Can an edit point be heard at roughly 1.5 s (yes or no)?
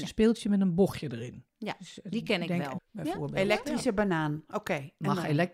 no